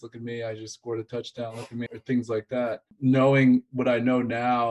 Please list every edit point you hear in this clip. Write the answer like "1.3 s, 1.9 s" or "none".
1.9 s